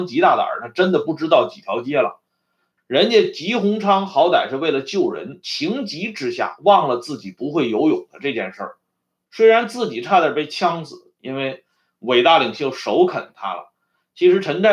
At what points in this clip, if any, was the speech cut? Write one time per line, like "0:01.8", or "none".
0:02.8
0:09.3
0:11.2